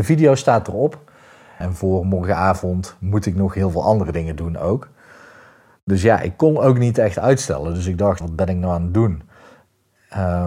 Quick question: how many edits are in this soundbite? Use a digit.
2